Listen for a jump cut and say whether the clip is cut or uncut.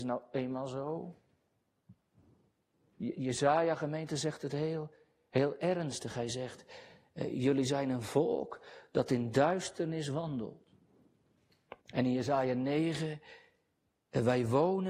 cut